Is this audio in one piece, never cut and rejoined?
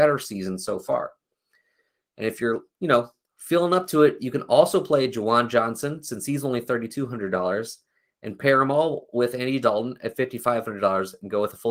yes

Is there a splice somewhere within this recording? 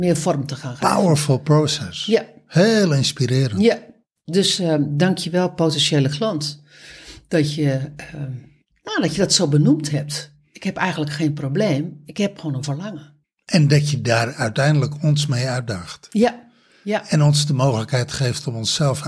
no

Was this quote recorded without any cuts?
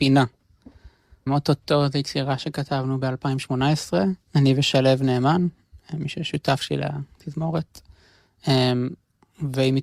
no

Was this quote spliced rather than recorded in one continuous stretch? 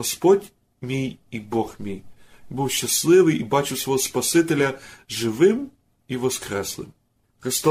no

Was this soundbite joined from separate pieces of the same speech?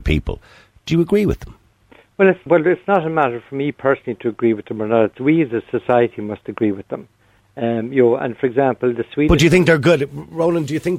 yes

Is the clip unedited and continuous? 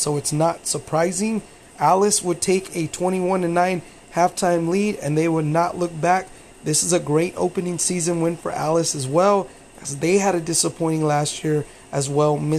no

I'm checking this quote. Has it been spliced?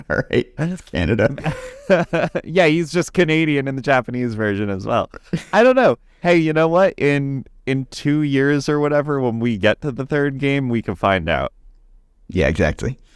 no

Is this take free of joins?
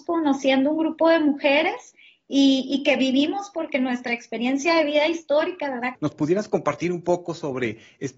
no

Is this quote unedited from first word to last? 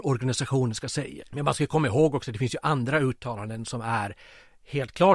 no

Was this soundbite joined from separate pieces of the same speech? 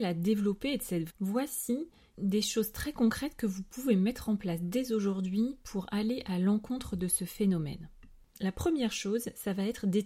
yes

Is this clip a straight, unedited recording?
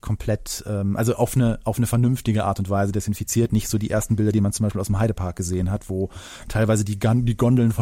yes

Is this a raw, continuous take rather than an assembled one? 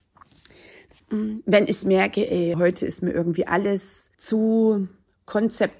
no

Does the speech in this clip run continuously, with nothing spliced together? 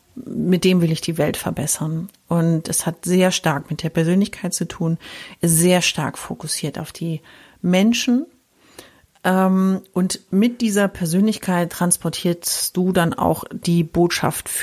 yes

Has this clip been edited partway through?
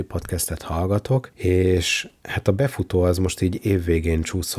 no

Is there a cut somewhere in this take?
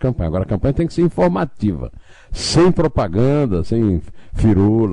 no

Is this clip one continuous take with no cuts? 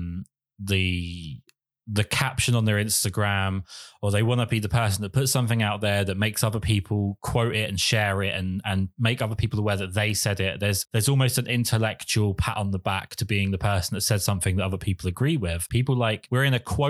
no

